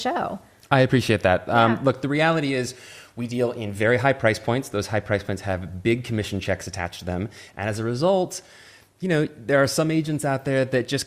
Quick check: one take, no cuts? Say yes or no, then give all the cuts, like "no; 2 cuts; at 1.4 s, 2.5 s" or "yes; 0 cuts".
yes; 0 cuts